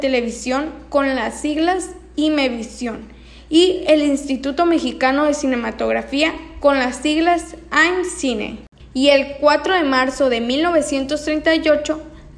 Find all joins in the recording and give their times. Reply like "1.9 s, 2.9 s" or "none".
8.8 s